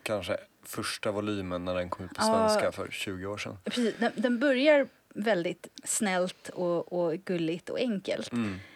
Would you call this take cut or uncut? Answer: uncut